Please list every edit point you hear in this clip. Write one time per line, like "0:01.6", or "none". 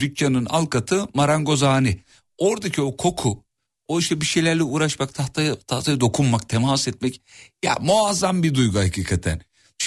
none